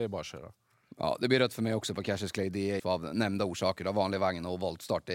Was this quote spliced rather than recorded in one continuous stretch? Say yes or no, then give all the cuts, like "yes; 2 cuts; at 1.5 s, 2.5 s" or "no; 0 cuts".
yes; 1 cut; at 2.8 s